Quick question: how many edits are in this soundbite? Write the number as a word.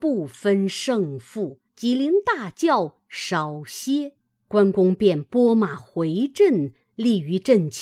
one